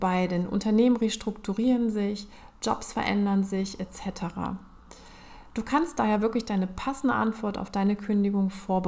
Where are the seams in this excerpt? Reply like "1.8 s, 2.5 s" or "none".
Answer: none